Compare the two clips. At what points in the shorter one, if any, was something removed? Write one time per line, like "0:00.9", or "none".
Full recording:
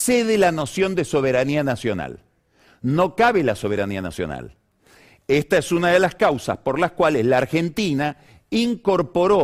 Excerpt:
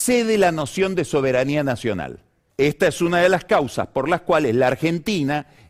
0:02.5